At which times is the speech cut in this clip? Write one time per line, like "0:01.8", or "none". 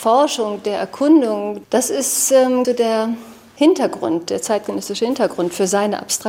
0:01.6
0:02.6

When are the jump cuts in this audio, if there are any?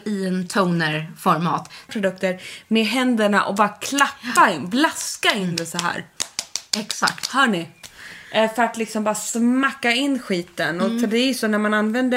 0:01.9

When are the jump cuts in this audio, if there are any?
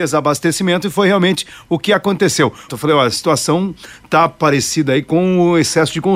0:02.7

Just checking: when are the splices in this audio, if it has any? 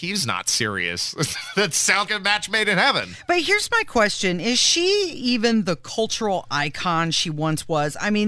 0:02.1

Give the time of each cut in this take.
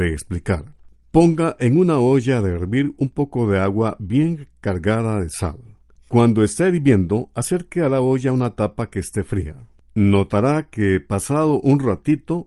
none

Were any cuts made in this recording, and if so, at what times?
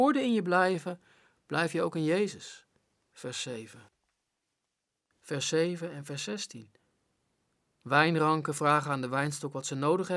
0:05.1

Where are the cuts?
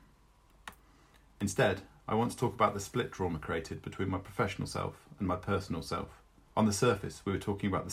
0:06.5

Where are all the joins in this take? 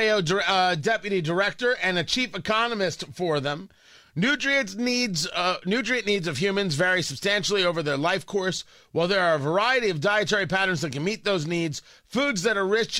none

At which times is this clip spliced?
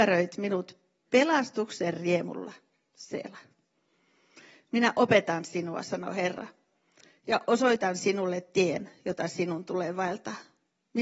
none

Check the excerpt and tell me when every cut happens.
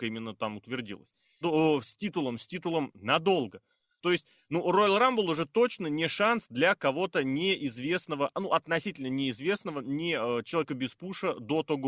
0:01.4
0:04.0

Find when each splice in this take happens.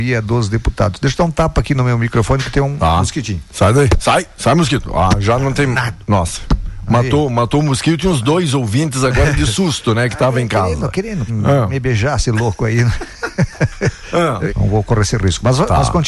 0:11.3
0:14.5

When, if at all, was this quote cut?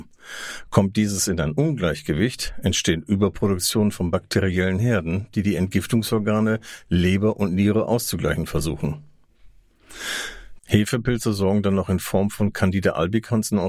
0:05.3
0:10.6

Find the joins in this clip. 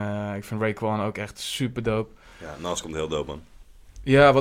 none

